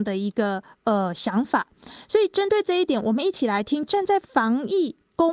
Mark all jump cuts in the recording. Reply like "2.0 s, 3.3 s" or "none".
none